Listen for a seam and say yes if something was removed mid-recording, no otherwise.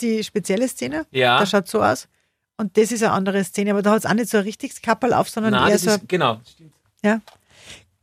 no